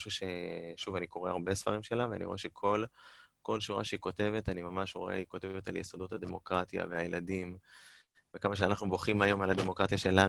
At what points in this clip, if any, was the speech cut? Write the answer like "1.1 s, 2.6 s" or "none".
none